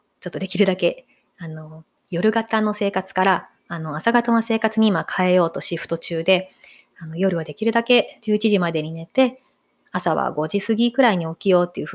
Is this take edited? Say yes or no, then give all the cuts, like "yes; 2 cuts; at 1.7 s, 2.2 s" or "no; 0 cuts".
no; 0 cuts